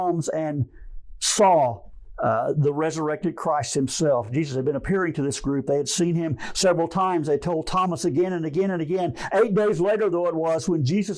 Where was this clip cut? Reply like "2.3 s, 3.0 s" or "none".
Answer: none